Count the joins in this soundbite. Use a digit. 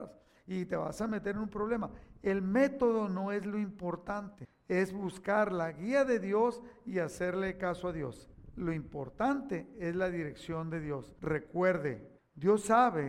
1